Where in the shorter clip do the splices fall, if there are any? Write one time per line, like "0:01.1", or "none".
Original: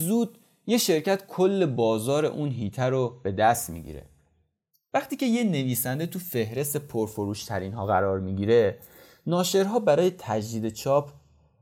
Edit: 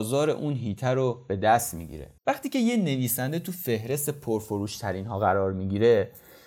0:02.2